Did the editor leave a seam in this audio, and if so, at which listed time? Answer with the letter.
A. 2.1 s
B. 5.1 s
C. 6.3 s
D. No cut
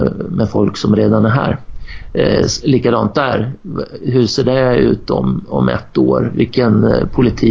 D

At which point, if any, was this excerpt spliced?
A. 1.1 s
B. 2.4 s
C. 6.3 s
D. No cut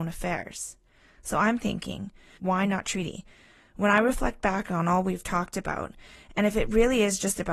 B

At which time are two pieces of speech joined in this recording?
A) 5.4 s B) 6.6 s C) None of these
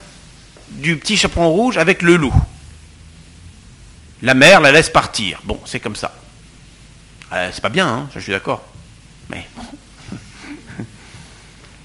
C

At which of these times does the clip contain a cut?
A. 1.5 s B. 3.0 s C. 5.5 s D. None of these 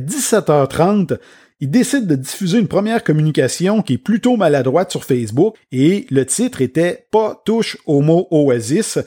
C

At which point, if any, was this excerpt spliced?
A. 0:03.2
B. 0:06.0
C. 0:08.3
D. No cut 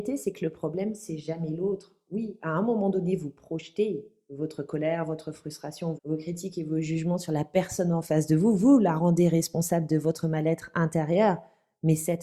B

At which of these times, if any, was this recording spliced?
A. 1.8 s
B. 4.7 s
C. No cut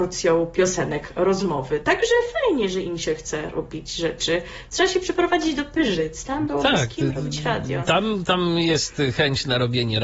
C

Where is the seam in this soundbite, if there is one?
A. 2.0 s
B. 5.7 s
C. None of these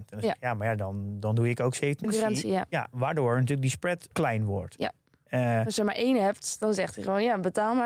A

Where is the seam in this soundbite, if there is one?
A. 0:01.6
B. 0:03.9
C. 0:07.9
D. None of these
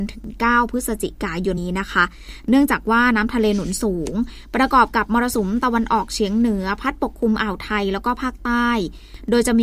A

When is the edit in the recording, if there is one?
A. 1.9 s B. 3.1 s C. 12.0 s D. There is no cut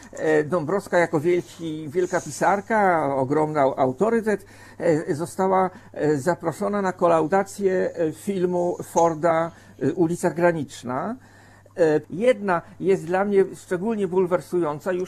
C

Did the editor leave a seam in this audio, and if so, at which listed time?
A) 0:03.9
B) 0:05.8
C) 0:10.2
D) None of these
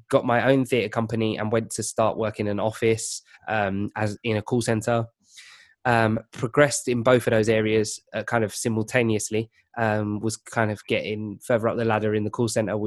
D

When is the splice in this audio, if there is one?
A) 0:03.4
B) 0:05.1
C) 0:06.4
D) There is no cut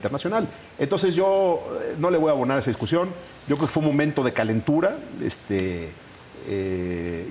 D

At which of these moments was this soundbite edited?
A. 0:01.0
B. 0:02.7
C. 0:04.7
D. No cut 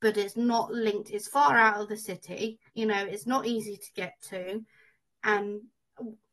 B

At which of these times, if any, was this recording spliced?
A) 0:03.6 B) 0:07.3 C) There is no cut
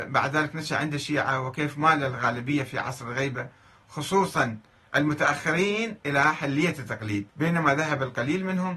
B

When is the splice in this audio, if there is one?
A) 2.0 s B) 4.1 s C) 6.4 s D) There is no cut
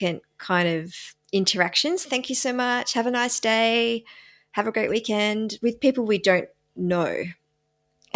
A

